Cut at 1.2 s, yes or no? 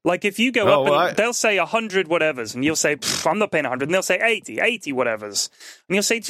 no